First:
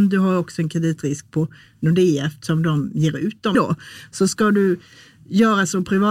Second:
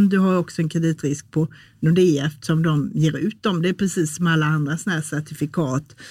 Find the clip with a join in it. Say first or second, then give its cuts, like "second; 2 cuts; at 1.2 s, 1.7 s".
first; 1 cut; at 3.5 s